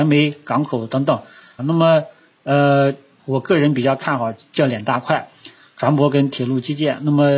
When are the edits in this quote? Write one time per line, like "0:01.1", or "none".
0:01.6
0:03.2